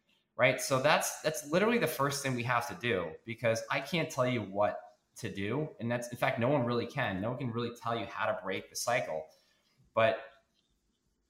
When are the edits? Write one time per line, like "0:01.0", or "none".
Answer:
none